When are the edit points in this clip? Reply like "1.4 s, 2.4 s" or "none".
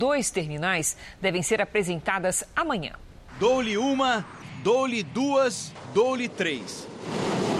none

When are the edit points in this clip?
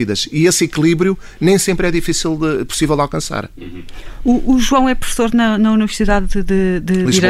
none

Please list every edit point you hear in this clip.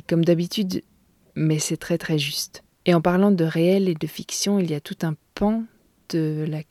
1.2 s, 2.7 s

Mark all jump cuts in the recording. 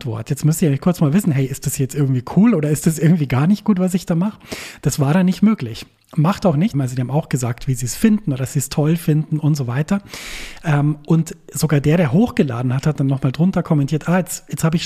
6.7 s

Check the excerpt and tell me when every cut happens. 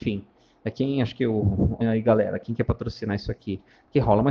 1.8 s

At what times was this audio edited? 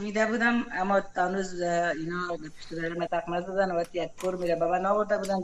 3.1 s

